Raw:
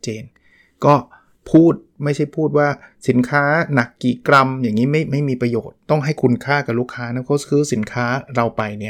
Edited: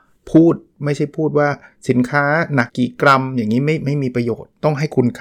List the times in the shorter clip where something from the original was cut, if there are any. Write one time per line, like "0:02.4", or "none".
0:02.7